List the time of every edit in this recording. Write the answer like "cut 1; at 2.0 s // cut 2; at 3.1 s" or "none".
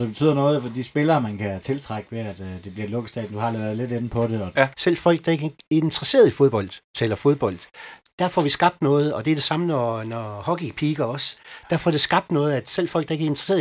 cut 1; at 4.7 s